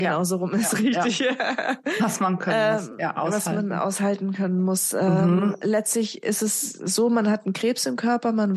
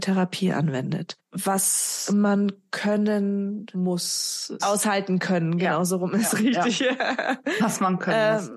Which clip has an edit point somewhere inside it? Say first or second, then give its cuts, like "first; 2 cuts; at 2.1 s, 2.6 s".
second; 2 cuts; at 1.2 s, 4.6 s